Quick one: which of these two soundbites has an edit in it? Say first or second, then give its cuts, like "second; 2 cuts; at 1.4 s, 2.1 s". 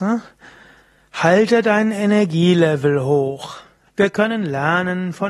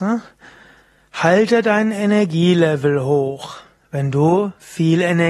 first; 1 cut; at 3.9 s